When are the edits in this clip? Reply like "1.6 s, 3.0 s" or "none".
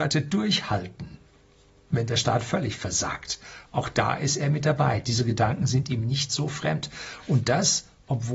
none